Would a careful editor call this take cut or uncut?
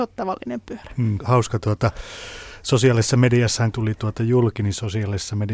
cut